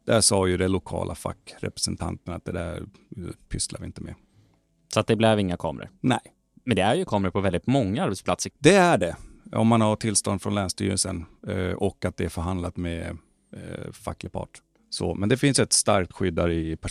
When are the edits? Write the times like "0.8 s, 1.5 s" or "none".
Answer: 8.5 s